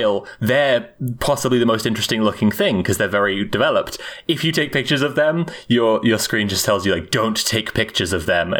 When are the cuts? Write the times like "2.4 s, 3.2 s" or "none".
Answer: none